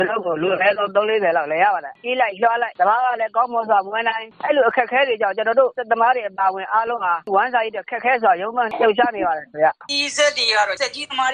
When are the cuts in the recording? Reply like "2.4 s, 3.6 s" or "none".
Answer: 9.9 s